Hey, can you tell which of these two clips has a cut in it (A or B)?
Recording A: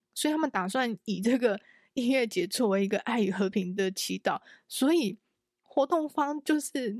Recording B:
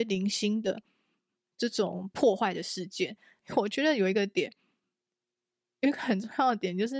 B